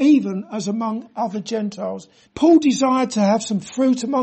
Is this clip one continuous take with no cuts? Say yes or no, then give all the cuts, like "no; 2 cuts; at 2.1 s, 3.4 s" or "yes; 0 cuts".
no; 1 cut; at 2.2 s